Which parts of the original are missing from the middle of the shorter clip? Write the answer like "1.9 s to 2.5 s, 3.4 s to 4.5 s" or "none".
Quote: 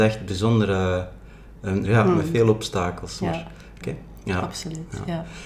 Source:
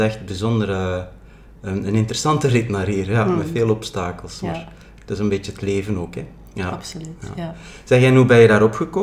1.8 s to 3.1 s, 5.0 s to 6.1 s

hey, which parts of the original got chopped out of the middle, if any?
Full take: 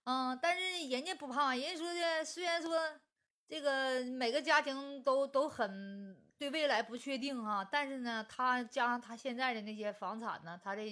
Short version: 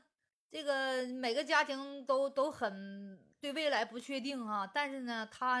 none

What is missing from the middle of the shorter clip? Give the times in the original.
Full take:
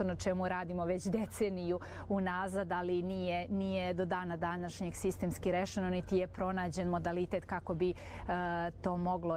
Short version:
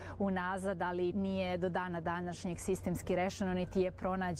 3.0 s to 3.5 s

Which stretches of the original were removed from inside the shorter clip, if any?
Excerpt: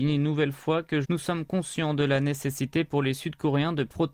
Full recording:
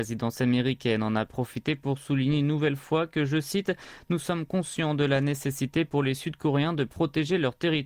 3.3 s to 4.0 s

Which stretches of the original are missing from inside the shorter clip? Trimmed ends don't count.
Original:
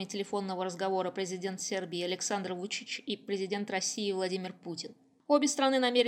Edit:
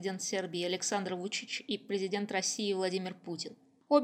none

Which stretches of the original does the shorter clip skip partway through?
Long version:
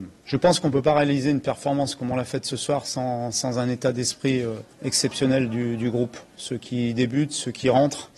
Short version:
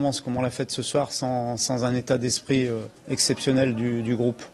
none

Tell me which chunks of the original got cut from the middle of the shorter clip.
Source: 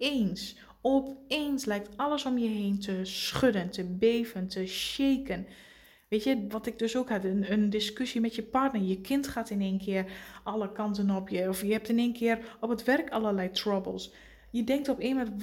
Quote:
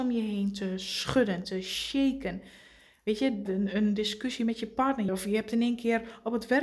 3.7 s to 4.5 s, 6.5 s to 7.2 s, 8.8 s to 11.5 s

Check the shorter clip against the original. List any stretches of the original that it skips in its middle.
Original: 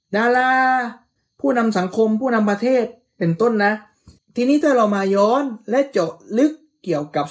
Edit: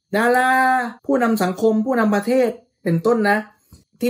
1.0 s to 1.3 s

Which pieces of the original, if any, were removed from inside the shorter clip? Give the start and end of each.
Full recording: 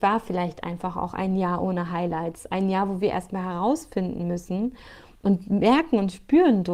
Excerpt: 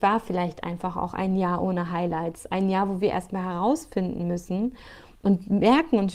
none

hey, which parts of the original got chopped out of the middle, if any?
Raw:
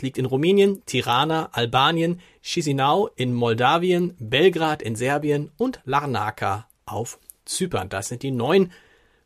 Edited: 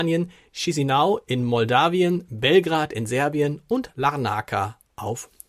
none

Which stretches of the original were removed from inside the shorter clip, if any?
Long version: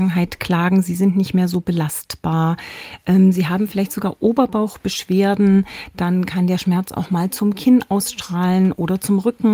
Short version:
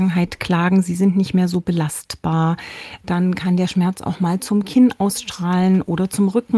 3.0 s to 5.9 s

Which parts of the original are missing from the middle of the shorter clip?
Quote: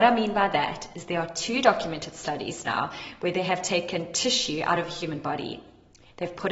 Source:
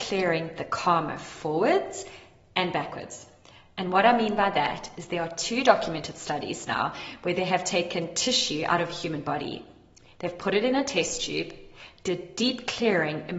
none

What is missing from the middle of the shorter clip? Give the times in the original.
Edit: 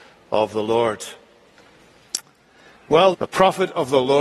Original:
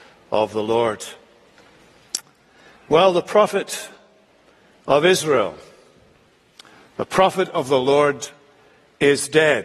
3.1 s to 6.9 s

